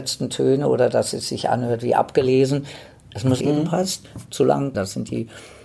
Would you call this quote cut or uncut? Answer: cut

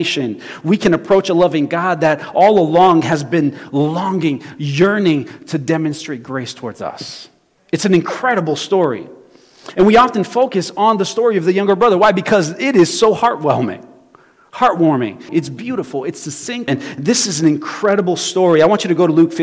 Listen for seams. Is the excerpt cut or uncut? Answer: cut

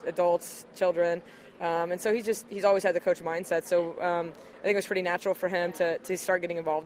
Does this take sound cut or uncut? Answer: uncut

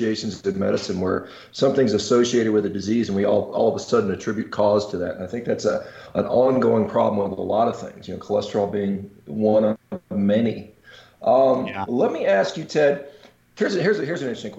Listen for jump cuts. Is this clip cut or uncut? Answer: uncut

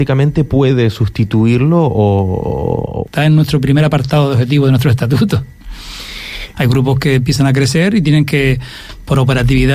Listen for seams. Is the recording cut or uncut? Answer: cut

